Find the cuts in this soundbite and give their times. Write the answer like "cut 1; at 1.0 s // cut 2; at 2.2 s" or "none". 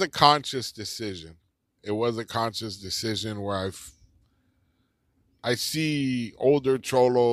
cut 1; at 1.8 s

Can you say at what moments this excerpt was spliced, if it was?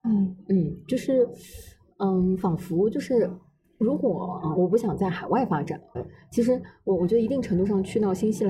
cut 1; at 4.6 s // cut 2; at 5.9 s

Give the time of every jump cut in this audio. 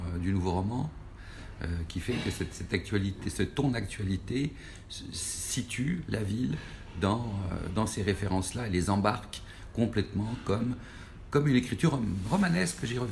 none

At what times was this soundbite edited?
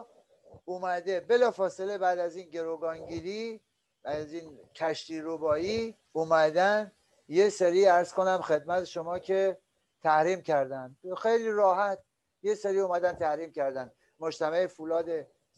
cut 1; at 6.0 s

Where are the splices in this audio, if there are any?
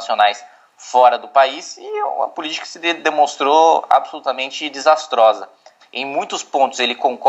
cut 1; at 5.8 s

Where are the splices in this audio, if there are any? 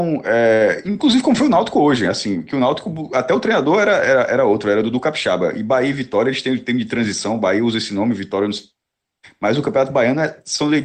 none

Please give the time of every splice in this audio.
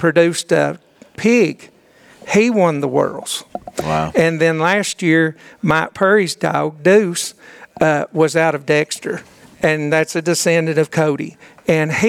cut 1; at 1.2 s

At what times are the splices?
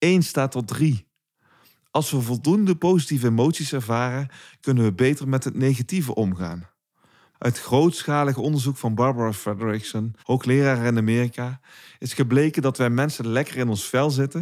cut 1; at 7.3 s // cut 2; at 10.2 s

